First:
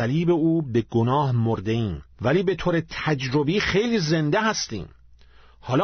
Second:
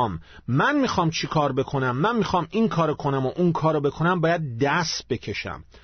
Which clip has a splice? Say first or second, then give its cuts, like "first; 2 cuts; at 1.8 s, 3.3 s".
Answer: first; 1 cut; at 2.1 s